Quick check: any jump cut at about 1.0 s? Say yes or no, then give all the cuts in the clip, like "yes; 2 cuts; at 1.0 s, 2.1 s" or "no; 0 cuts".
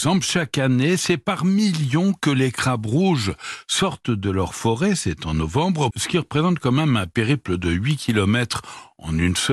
no; 1 cut; at 5.9 s